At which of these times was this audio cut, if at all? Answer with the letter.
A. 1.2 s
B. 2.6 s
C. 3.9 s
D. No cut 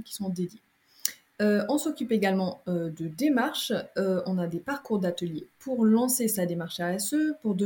D